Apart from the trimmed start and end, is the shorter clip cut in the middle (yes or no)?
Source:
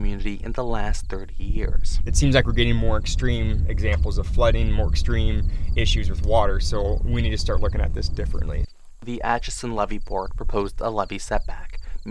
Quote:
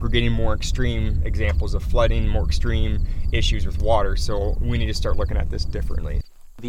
no